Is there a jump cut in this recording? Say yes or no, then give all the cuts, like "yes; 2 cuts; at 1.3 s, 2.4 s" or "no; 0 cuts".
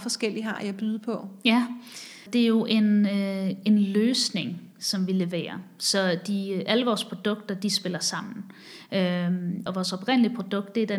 yes; 2 cuts; at 2.3 s, 9.7 s